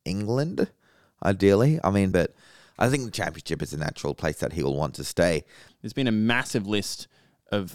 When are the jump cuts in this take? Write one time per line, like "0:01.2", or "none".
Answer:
0:02.1
0:05.7